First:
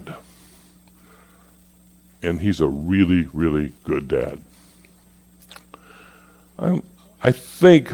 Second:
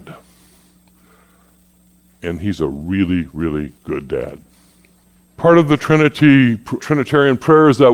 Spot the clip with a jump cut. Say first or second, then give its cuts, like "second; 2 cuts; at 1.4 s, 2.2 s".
second; 2 cuts; at 5.2 s, 6.8 s